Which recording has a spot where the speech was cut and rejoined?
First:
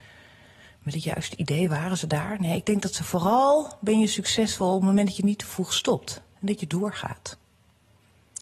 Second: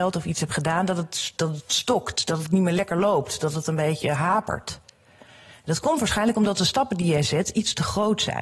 second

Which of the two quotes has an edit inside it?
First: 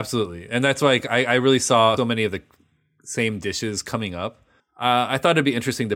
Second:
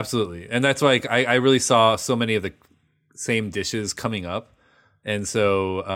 first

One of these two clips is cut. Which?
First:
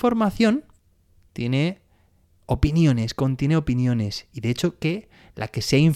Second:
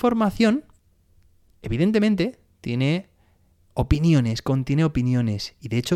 first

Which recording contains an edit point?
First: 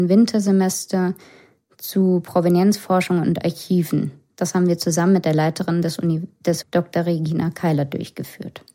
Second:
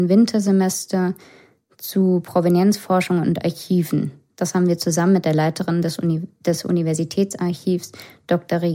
first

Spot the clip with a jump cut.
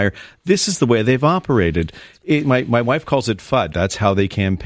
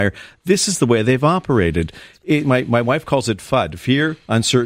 first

